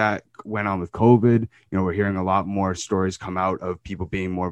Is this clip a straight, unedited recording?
yes; 0 cuts

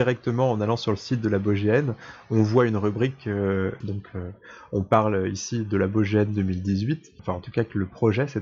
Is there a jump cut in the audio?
yes; 2 cuts; at 3.8 s, 7.2 s

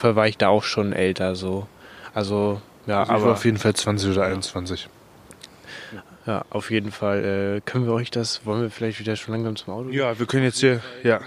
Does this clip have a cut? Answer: no; 0 cuts

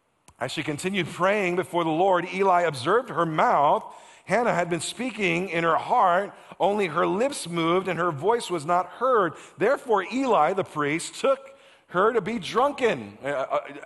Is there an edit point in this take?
no; 0 cuts

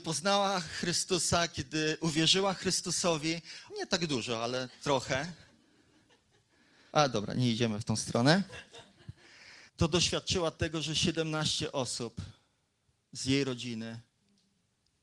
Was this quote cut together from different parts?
yes; 3 cuts; at 3.7 s, 6.9 s, 9.7 s

